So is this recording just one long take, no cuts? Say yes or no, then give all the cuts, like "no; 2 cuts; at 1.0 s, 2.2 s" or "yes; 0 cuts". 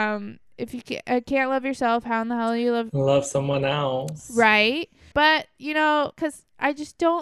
no; 2 cuts; at 5.1 s, 6.1 s